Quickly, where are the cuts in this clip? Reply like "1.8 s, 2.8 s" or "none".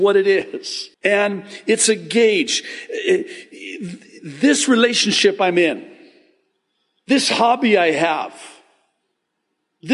0.9 s